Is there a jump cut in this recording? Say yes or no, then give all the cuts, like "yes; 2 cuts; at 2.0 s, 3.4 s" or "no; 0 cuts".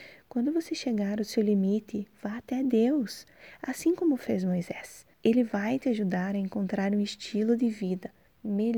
yes; 1 cut; at 5.1 s